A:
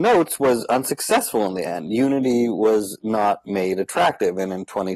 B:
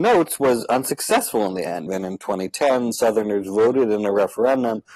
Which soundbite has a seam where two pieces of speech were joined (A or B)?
B